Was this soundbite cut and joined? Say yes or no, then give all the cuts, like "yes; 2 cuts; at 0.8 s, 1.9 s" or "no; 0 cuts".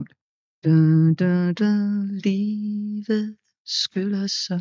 no; 0 cuts